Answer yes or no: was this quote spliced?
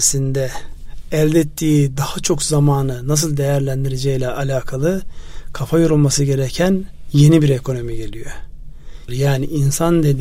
yes